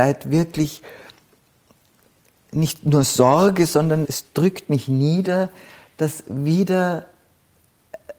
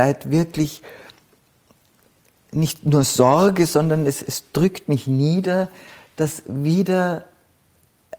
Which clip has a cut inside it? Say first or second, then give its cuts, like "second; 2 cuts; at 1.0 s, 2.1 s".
first; 1 cut; at 4.0 s